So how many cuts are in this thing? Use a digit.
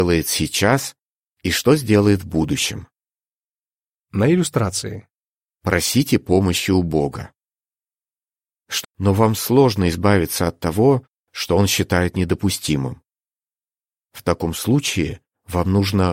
2